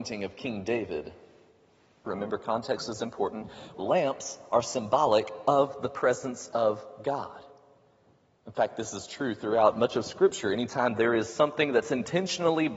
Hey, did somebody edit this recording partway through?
yes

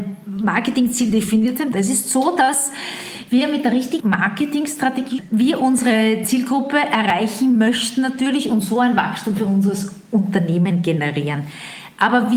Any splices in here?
yes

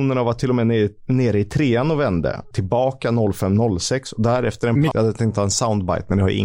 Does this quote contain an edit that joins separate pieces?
yes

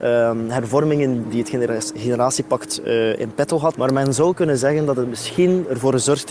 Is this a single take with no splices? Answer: no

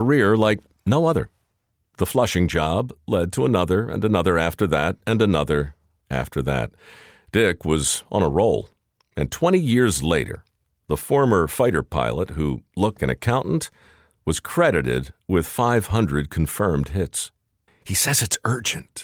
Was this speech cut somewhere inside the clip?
yes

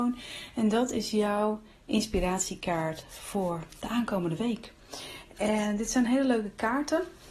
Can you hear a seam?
no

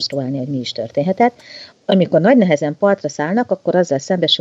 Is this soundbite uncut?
no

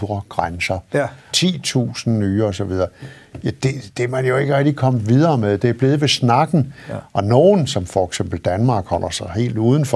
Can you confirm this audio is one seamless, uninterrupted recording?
no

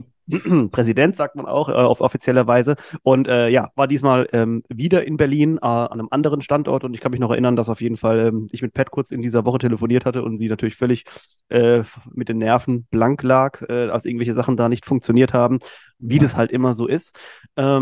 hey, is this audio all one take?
yes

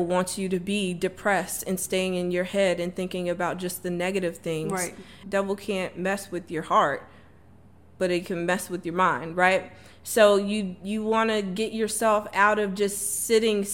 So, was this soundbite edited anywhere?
yes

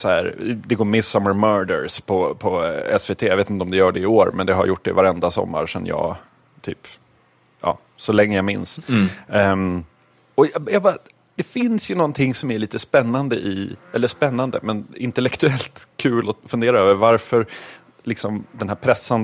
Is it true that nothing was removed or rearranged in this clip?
yes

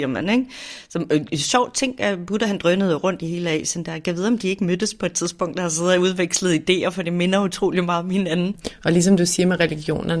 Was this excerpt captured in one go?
yes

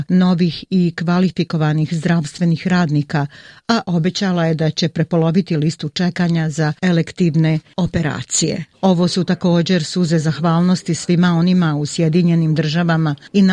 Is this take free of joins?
no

